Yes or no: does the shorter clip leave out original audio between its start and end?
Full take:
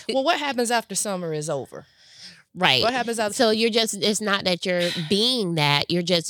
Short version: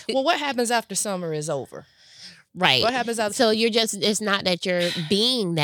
no